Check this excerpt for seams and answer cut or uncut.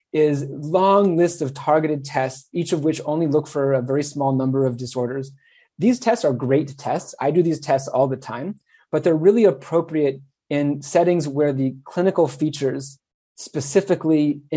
uncut